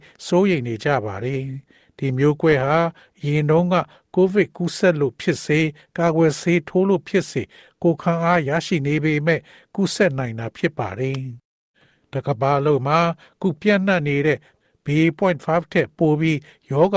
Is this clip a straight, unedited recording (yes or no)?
yes